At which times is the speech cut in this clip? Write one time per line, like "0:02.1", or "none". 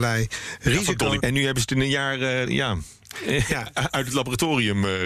0:01.2
0:02.4

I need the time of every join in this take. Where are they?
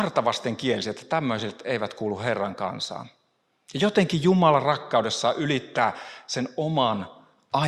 none

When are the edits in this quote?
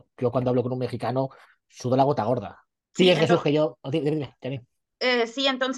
0:02.8

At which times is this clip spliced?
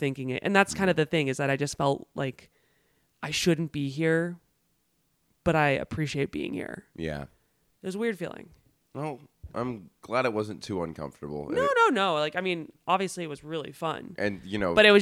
none

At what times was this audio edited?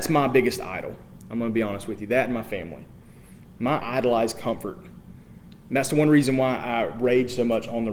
0:03.8

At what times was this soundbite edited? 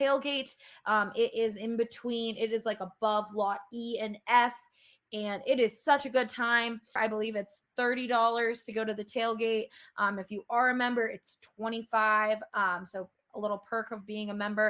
0:07.0

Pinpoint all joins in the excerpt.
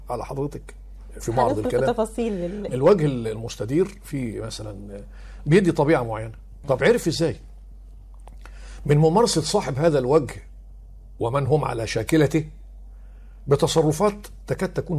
0:01.2

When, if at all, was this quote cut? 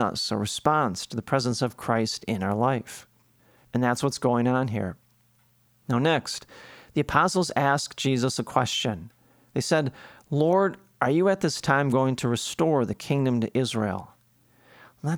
none

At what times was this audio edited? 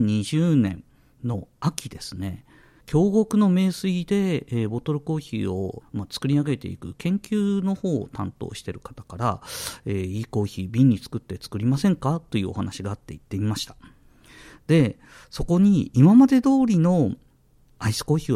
0:05.8

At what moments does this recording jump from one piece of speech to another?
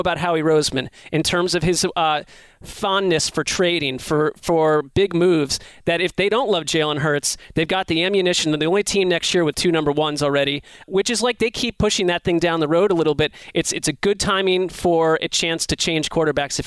0:10.8

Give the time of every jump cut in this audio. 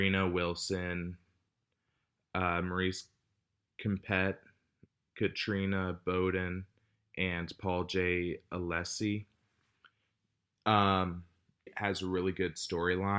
0:11.7

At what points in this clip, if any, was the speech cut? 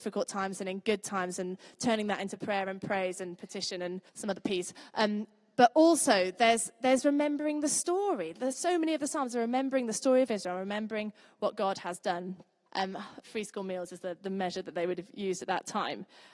0:04.1
0:12.7

